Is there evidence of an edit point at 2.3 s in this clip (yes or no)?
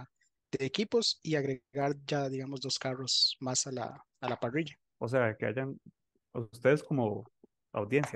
no